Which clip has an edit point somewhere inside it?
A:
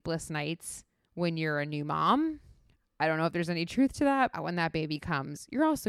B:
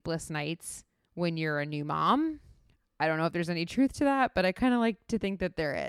A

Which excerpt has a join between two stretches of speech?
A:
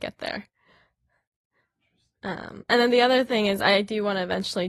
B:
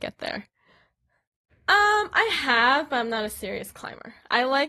B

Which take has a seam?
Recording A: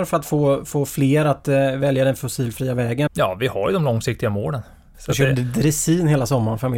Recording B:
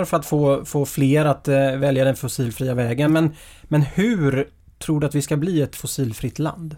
A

